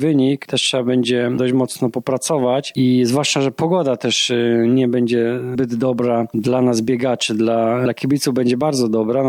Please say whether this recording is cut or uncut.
uncut